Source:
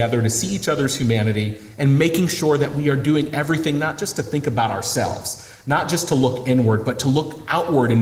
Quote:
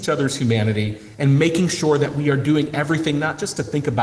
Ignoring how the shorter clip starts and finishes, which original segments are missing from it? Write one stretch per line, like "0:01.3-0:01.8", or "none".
none